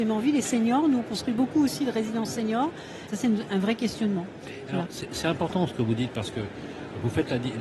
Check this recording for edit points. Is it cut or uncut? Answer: cut